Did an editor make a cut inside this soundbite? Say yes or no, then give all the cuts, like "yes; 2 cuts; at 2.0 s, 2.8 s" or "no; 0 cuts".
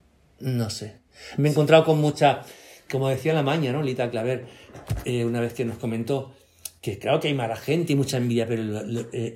no; 0 cuts